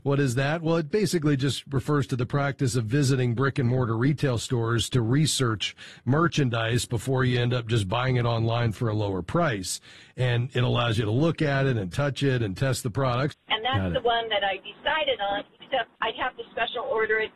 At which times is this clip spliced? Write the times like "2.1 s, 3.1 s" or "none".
13.3 s, 16.0 s

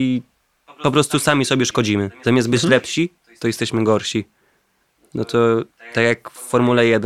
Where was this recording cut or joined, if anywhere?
none

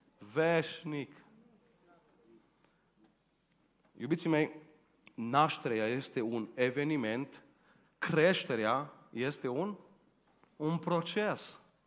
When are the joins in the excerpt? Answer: none

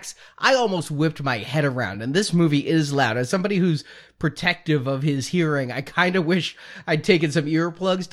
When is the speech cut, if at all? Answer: none

